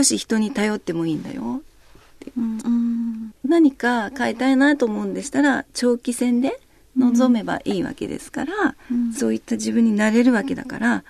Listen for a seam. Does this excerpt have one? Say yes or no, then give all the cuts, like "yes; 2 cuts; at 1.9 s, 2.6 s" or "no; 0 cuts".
yes; 2 cuts; at 2.6 s, 9.1 s